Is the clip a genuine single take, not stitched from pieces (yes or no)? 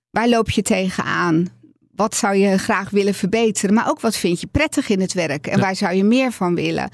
yes